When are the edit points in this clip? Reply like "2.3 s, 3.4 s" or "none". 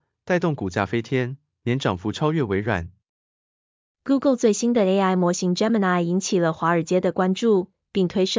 none